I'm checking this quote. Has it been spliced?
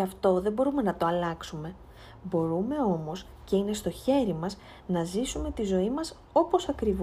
no; 0 cuts

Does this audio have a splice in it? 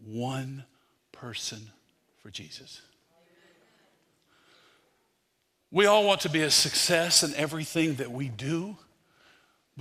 no; 0 cuts

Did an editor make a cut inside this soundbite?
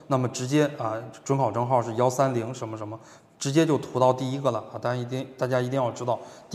no; 0 cuts

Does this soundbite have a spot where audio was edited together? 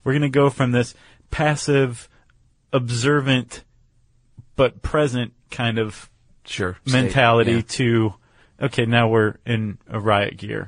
no; 0 cuts

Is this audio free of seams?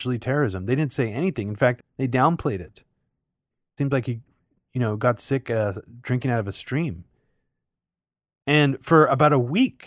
no; 2 cuts; at 1.8 s, 3.8 s

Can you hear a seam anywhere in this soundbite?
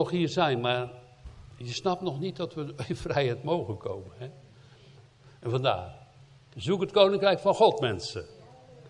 yes; 2 cuts; at 5.0 s, 6.5 s

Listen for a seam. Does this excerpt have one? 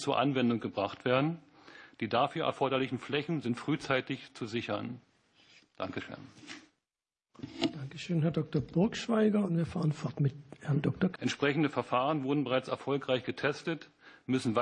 yes; 1 cut; at 11.1 s

